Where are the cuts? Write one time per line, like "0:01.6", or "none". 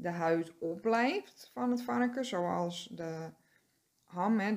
none